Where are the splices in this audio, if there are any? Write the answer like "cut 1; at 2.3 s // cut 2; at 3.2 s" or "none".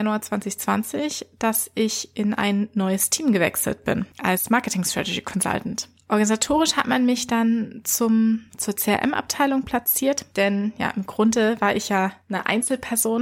none